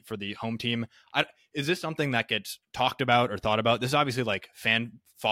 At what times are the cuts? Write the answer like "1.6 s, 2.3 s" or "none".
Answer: none